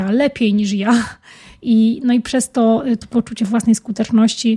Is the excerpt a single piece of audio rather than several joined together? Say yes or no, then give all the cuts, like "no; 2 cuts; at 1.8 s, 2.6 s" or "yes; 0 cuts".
yes; 0 cuts